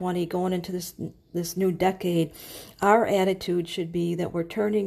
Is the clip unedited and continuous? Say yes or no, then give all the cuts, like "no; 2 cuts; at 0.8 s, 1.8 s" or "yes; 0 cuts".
yes; 0 cuts